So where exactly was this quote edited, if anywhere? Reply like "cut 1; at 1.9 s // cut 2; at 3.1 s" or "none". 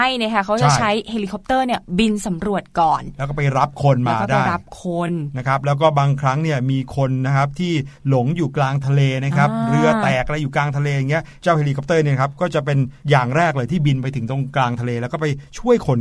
none